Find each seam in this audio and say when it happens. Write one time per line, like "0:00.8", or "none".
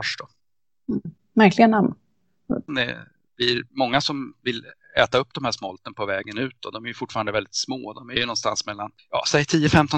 0:02.7